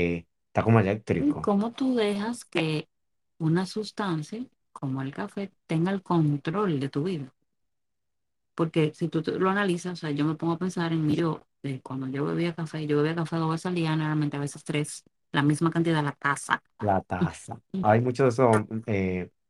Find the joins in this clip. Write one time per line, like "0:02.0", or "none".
0:16.8
0:17.8